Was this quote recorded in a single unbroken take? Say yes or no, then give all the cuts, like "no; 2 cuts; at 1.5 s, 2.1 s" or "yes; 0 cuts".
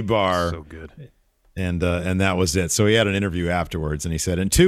yes; 0 cuts